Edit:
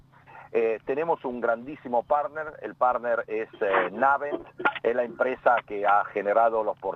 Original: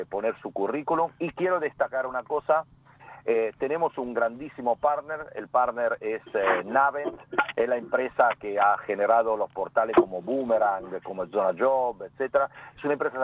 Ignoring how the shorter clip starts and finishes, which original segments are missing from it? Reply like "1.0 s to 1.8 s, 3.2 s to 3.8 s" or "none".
none